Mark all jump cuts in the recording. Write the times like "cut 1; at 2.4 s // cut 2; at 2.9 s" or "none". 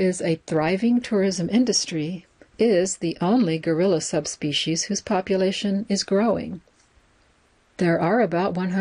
cut 1; at 7.7 s